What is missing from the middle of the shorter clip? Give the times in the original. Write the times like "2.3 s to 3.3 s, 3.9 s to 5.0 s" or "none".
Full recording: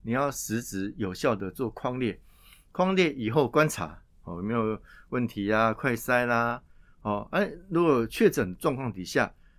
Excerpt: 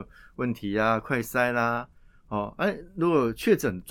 none